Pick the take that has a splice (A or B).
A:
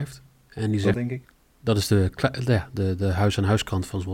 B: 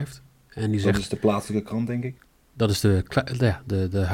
A